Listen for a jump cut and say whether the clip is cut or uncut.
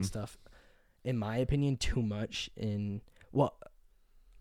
uncut